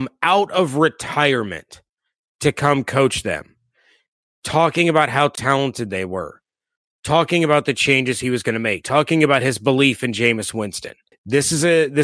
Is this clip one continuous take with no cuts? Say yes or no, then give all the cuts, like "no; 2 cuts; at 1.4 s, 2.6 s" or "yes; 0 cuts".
no; 1 cut; at 11.1 s